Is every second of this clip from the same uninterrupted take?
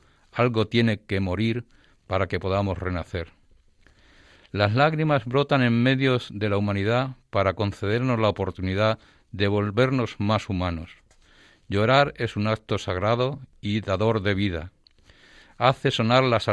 yes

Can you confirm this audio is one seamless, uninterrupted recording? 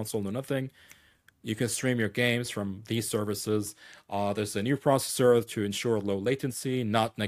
yes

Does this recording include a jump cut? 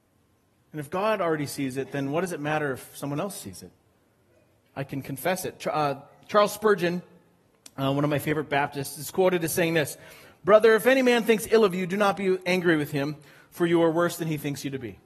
no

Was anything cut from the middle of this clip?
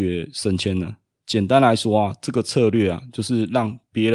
yes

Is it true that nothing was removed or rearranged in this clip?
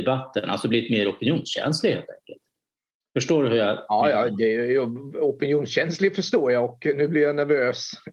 yes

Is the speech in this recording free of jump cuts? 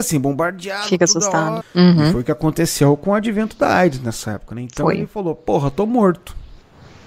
no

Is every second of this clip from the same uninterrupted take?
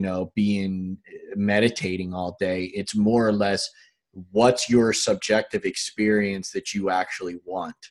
yes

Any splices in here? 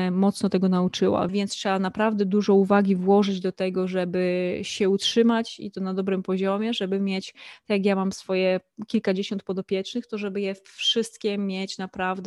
yes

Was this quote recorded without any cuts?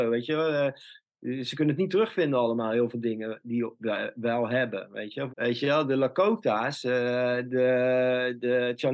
no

